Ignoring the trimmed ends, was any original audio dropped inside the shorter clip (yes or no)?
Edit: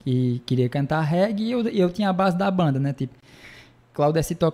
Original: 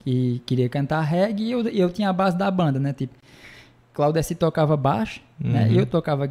no